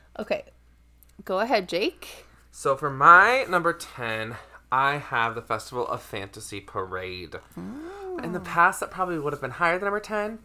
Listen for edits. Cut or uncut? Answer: cut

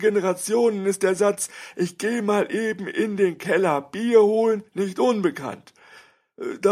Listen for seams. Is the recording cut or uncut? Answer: uncut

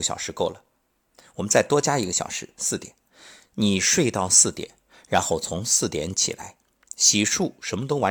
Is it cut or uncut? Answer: uncut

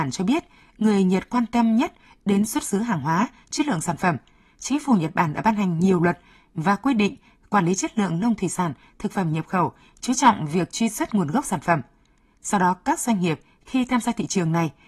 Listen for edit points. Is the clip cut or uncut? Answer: uncut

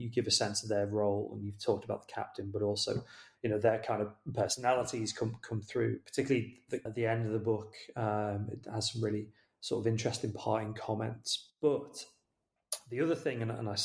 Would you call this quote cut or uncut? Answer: cut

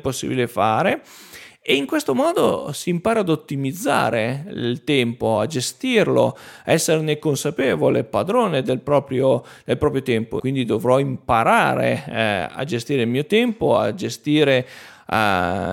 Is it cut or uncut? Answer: cut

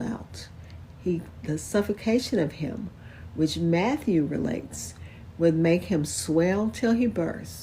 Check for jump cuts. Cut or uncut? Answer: uncut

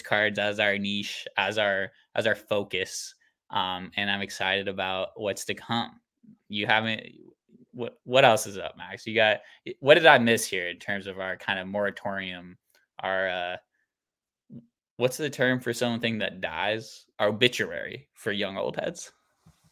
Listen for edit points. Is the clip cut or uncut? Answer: cut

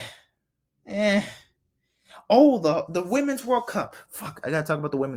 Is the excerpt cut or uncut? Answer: uncut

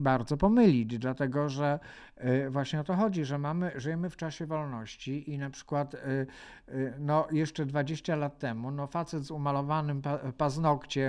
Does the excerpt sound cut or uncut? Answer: uncut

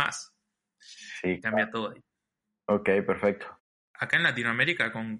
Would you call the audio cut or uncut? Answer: cut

